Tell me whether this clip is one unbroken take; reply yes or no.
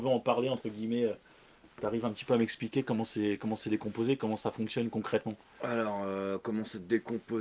yes